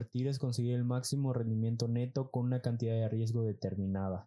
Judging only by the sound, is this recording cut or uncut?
uncut